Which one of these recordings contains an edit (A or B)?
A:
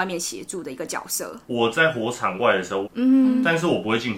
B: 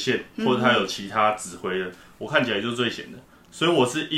A